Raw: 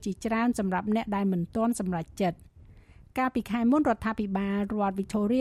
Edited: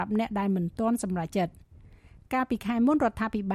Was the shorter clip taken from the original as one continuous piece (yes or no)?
no